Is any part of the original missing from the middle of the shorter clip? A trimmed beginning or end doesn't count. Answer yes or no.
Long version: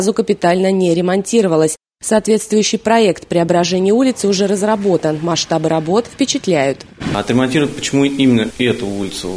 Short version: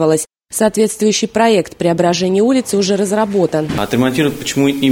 yes